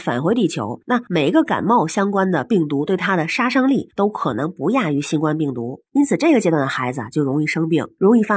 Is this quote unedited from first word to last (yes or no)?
no